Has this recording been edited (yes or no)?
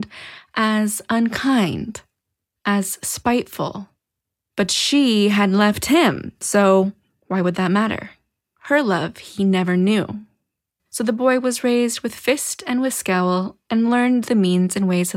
yes